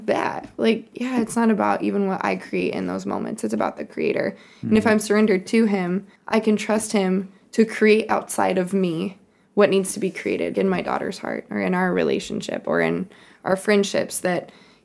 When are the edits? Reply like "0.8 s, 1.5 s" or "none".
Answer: 6.2 s, 10.5 s